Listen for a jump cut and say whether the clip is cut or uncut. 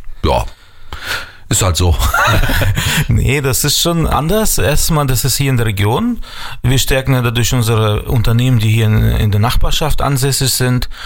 uncut